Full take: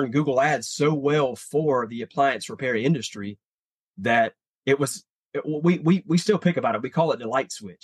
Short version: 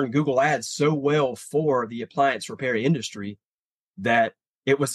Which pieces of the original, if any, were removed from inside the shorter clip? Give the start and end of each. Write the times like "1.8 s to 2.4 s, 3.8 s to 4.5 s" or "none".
none

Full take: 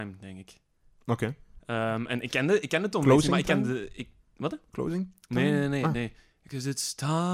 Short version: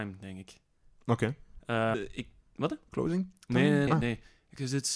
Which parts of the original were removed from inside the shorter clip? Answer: 1.9 s to 3.8 s, 5.7 s to 5.8 s

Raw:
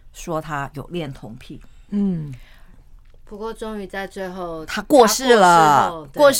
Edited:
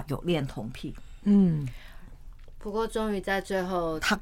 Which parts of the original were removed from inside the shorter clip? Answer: none

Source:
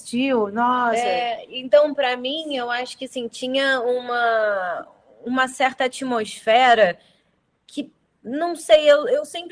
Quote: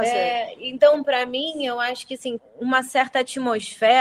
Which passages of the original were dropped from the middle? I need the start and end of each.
3.3 s to 5.0 s

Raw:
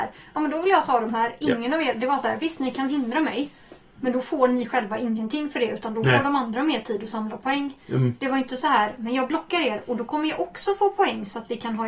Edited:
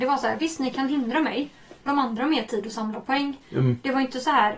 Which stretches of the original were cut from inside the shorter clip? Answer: 3.9 s to 6.2 s

